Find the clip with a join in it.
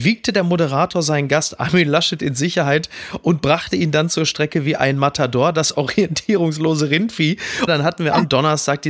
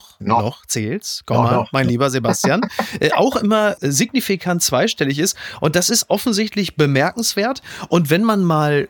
first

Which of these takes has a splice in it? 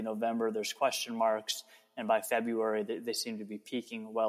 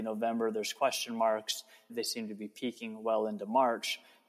second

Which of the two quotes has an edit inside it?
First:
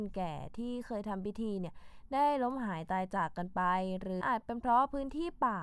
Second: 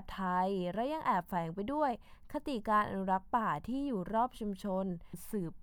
first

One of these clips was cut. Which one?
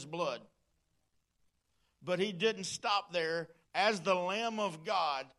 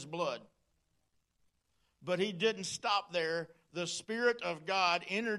first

